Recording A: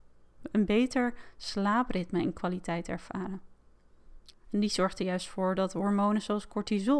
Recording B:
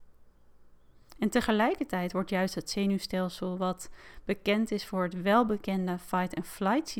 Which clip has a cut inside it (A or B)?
A